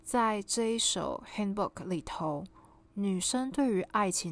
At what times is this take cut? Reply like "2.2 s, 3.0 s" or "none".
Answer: 2.8 s